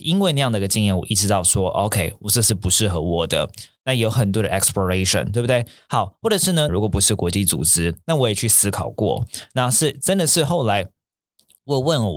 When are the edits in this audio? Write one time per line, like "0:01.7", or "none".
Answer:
0:06.7